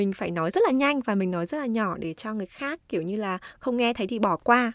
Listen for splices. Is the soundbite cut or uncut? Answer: uncut